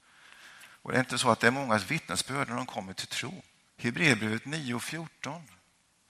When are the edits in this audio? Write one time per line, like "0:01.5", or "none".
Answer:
0:03.7

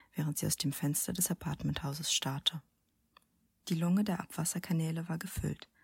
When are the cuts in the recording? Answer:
0:03.5

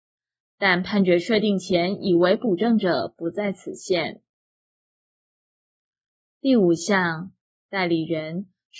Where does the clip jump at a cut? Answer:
0:07.6

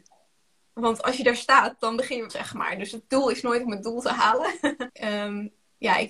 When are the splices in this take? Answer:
0:02.3
0:04.9

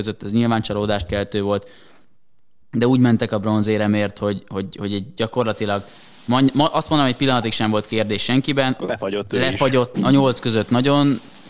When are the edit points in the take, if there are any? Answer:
0:08.8
0:09.9

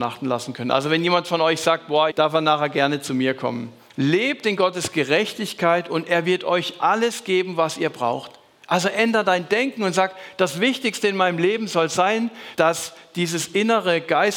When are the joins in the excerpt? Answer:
0:02.1
0:03.9
0:12.6

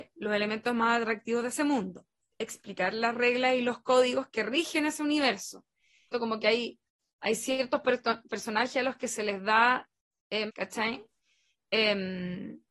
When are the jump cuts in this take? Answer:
0:06.1
0:10.5

